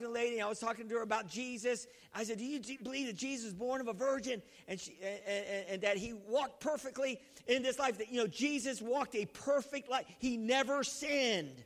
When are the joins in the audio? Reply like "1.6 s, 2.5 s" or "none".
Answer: none